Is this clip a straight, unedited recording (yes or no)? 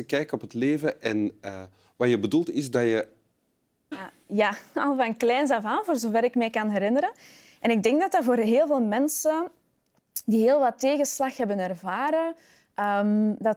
no